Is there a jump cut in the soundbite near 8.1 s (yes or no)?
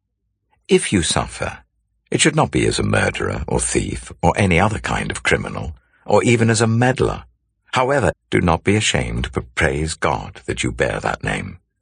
yes